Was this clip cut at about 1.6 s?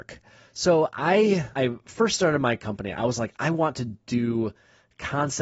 yes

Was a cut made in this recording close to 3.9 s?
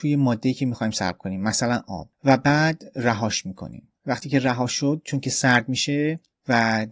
no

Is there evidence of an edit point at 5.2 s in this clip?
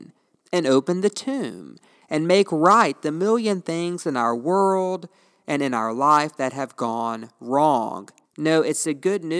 no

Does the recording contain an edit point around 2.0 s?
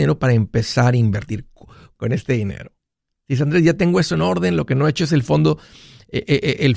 yes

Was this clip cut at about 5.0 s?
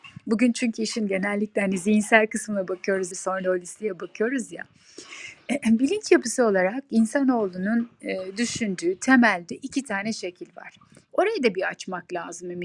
no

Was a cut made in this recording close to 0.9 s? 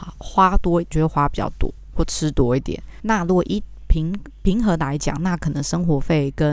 yes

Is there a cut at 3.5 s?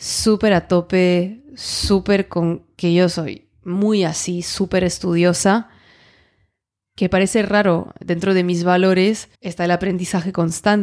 no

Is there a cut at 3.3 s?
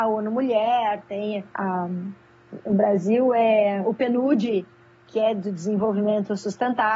no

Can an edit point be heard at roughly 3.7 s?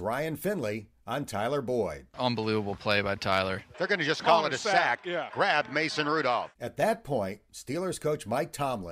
yes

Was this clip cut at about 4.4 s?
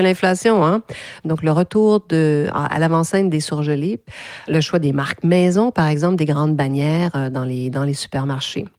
yes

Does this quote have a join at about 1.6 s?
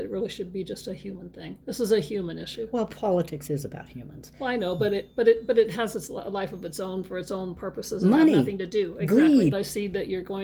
yes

